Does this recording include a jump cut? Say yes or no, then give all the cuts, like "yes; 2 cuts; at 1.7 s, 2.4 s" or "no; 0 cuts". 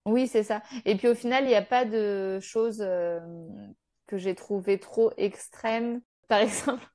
no; 0 cuts